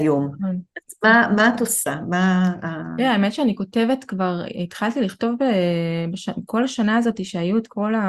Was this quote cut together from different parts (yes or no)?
no